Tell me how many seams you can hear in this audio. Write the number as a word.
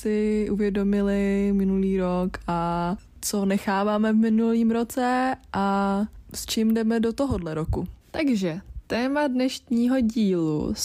one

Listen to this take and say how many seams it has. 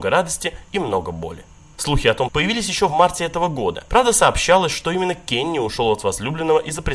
one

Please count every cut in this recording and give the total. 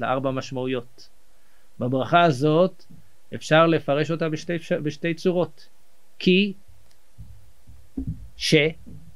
zero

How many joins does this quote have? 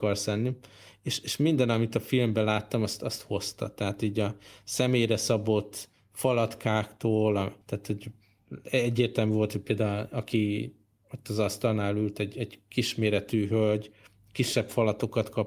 one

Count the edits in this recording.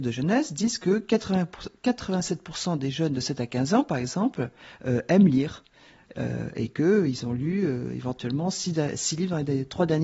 zero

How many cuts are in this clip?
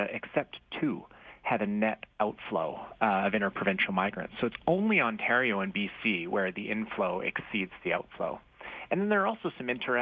zero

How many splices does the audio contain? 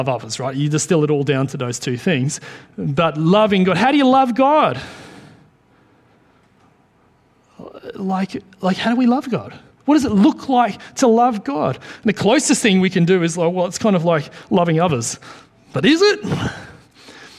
zero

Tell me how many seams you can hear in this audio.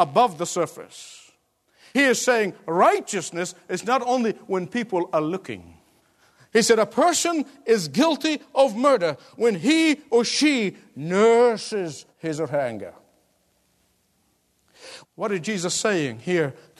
two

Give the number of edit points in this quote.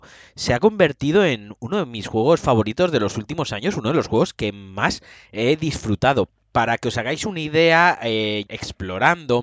one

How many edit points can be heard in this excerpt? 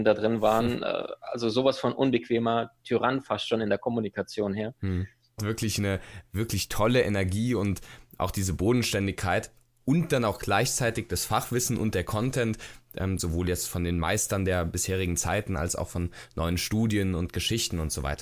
two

